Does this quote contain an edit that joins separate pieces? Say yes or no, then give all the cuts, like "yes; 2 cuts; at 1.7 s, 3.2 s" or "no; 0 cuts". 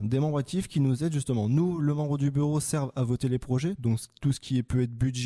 no; 0 cuts